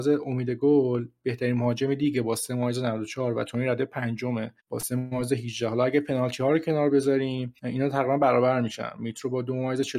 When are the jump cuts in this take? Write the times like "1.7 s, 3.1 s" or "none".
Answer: 4.6 s, 7.6 s